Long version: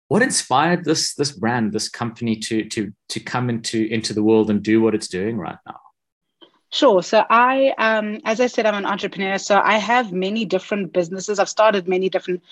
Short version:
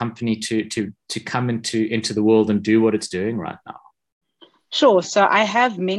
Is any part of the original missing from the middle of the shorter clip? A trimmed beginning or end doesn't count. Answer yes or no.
yes